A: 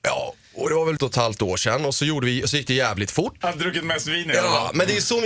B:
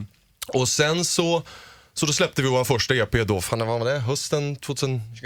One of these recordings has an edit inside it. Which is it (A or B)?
A